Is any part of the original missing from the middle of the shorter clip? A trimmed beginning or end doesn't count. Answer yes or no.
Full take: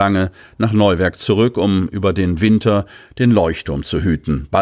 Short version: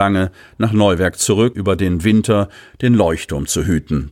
yes